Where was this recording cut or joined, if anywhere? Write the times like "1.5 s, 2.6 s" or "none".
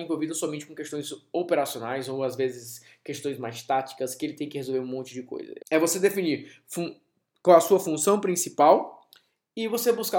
5.6 s

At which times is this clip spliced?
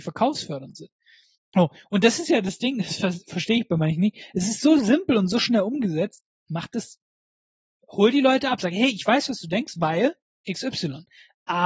1.4 s, 6.4 s

